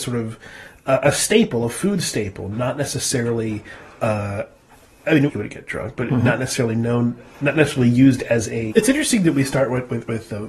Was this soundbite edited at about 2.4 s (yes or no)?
no